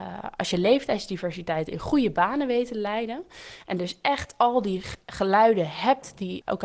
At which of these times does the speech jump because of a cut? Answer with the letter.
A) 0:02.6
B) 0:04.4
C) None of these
C